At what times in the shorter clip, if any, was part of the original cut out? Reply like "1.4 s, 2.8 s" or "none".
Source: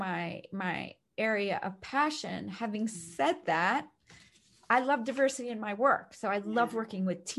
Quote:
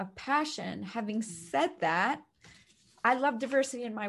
none